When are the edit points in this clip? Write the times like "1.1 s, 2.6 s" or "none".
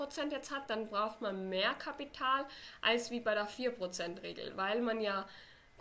none